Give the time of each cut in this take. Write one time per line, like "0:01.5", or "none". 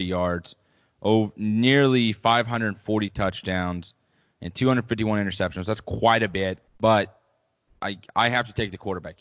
0:06.7